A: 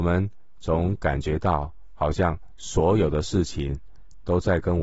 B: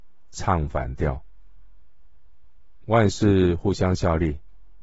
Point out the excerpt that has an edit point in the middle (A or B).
B